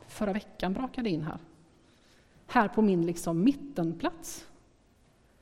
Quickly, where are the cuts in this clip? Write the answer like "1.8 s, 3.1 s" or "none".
none